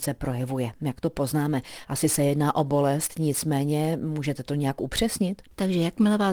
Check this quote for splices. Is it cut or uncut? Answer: uncut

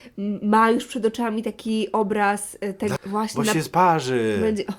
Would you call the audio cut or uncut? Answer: cut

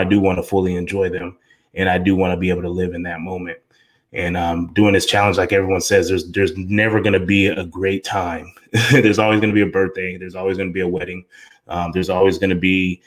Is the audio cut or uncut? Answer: uncut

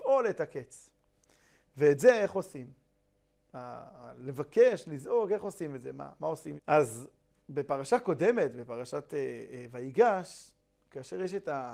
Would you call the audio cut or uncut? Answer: cut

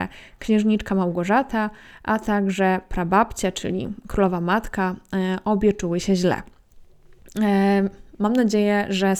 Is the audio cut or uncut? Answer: uncut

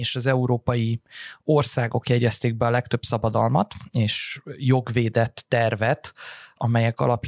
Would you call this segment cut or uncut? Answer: uncut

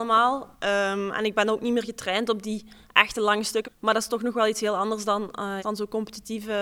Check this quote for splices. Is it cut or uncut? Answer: cut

